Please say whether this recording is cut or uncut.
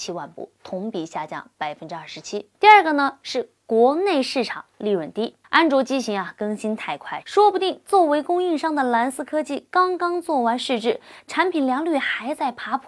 cut